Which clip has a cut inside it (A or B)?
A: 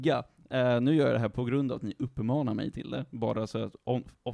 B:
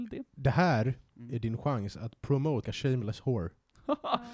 B